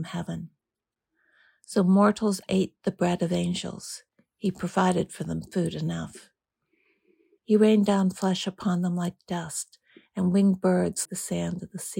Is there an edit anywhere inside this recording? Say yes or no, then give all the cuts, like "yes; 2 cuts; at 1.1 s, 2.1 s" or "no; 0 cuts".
yes; 2 cuts; at 7.4 s, 11.1 s